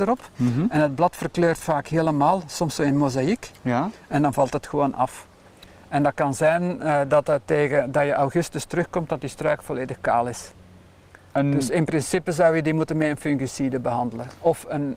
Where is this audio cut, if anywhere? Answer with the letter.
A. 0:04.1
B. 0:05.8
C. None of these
C